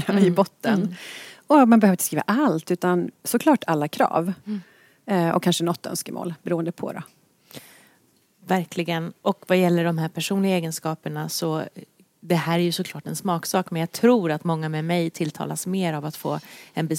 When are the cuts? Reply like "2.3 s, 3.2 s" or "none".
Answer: none